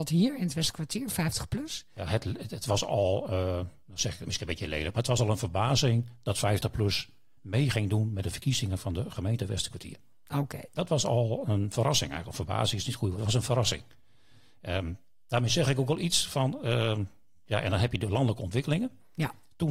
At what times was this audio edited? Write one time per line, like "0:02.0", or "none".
none